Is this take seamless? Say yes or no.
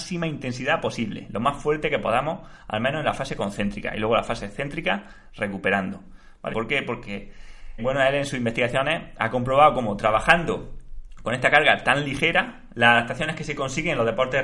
no